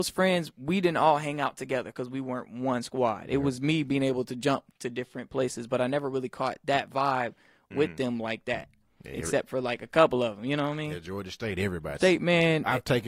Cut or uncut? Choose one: cut